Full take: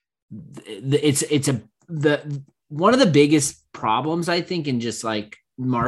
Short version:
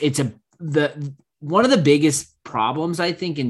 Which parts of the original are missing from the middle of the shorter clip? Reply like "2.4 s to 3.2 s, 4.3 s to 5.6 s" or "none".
none

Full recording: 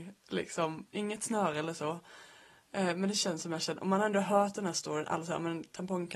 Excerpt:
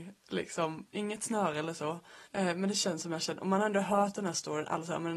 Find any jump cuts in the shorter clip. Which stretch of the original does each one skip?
2.2 s to 2.6 s

